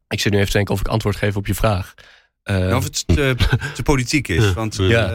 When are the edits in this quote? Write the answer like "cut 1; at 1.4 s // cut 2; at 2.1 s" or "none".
none

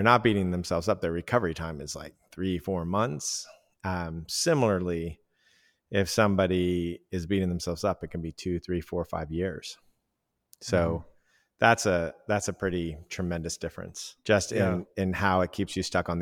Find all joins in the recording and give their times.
cut 1; at 14.2 s

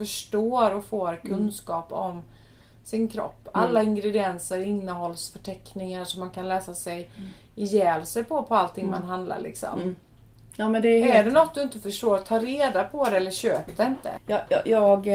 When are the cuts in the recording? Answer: cut 1; at 14.2 s

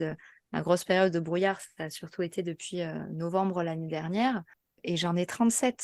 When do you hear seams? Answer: cut 1; at 4.6 s

